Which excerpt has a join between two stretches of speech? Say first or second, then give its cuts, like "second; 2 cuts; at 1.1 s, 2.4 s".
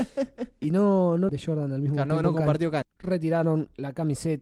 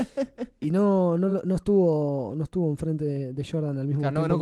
first; 2 cuts; at 1.3 s, 2.8 s